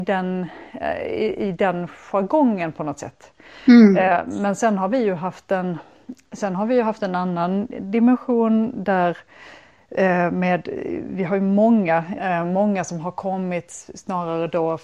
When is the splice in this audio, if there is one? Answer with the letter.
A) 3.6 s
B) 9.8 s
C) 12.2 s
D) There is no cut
C